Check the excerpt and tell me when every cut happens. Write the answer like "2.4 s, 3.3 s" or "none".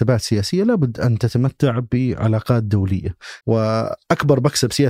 3.4 s